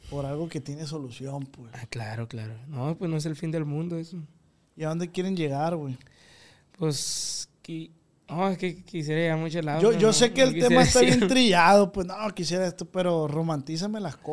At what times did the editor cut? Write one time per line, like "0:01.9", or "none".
none

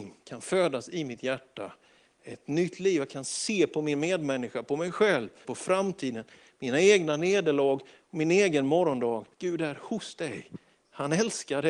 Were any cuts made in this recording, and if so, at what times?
0:05.4
0:09.3

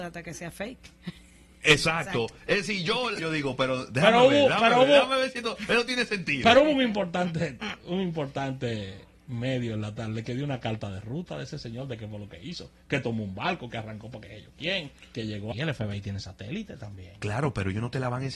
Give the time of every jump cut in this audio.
0:03.2
0:15.5

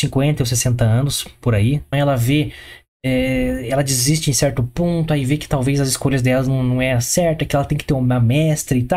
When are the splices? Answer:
0:01.9

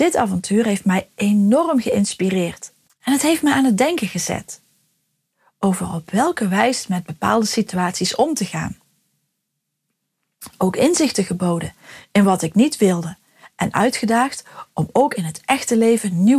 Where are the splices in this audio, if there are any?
0:02.9

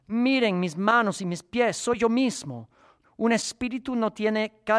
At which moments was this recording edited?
0:03.0

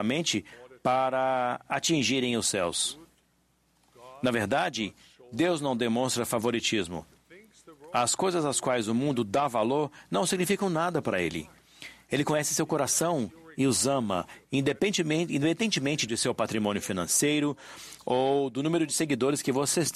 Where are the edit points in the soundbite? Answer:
0:16.1

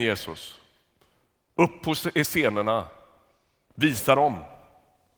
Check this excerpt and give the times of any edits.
none

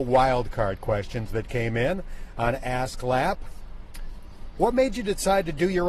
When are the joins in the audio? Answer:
0:04.5

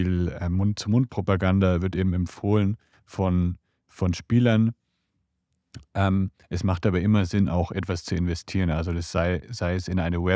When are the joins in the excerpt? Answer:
none

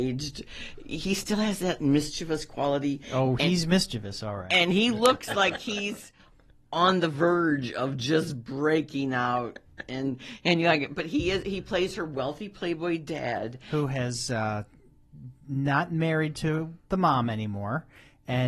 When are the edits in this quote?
none

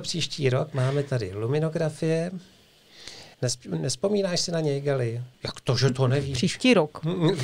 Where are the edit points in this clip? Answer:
0:03.3
0:05.3

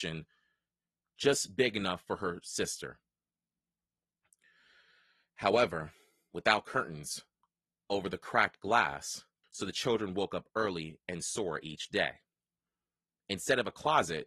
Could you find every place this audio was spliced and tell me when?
0:09.4

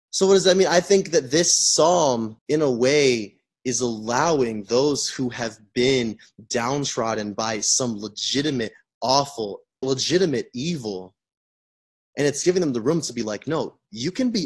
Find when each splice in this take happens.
0:02.4
0:09.8

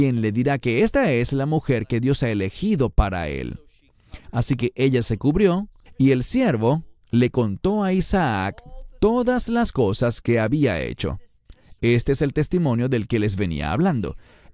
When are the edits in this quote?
0:05.9

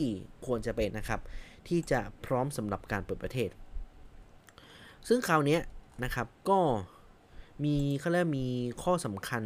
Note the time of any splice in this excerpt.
0:00.9
0:06.4

